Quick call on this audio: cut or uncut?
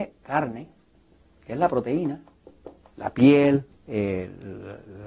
cut